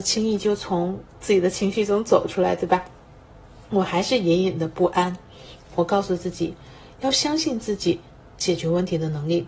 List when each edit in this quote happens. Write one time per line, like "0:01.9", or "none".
0:05.6